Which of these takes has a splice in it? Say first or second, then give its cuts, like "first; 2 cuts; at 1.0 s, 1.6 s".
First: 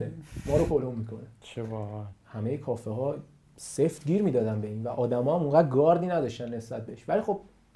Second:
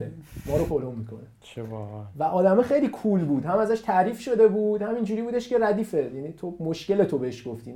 first; 1 cut; at 2.1 s